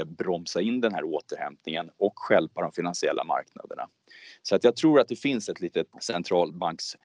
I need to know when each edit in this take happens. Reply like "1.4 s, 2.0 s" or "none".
5.9 s